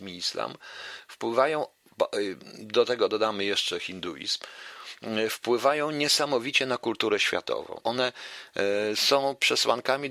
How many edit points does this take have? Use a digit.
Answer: 1